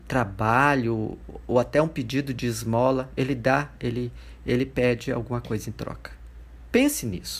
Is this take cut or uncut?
uncut